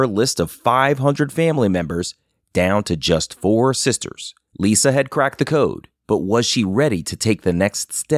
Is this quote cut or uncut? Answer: cut